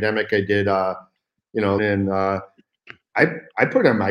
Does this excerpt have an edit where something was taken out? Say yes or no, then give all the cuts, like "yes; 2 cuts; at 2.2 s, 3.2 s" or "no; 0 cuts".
yes; 2 cuts; at 1.8 s, 3.1 s